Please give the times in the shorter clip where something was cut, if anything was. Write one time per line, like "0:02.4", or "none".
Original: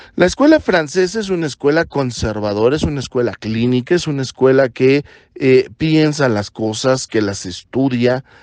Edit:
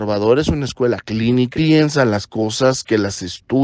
0:01.5